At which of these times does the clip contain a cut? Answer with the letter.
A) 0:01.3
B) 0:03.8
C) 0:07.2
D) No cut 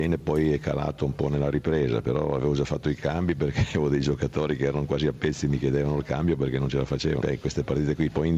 C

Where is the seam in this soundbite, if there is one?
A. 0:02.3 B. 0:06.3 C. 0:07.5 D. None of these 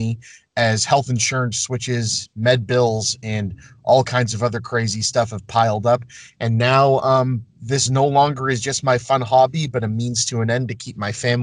D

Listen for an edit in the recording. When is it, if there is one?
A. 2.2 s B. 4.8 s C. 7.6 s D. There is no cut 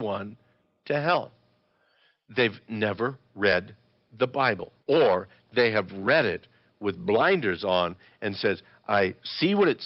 B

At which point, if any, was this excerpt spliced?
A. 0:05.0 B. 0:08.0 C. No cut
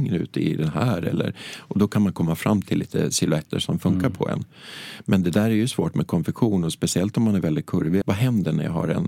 B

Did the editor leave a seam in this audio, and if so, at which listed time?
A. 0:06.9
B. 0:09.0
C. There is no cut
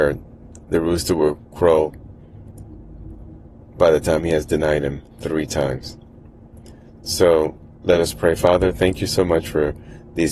C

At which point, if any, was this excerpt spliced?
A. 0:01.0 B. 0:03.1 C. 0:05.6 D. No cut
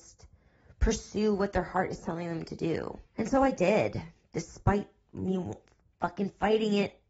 B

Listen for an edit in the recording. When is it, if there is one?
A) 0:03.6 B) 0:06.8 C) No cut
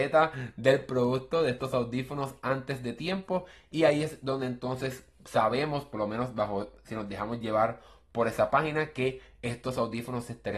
C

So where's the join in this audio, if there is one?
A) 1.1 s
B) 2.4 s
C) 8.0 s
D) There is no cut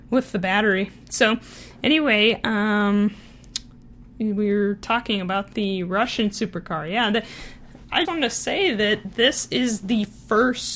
C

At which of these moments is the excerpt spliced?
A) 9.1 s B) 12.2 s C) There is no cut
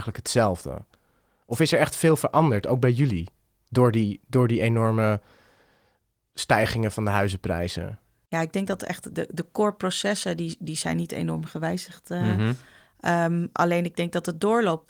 A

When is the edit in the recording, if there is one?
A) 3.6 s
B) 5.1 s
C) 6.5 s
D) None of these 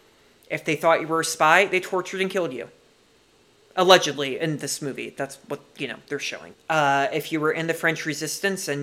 C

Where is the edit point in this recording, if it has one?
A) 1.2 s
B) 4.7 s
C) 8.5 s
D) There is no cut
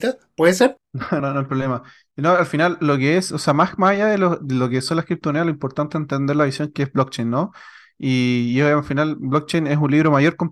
A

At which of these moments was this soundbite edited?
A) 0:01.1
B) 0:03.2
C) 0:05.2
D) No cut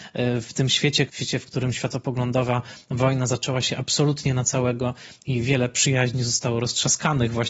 A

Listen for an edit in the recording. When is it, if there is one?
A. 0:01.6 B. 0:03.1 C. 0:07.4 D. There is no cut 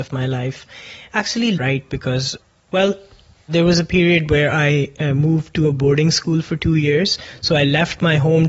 A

